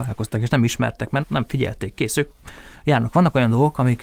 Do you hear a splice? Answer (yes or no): yes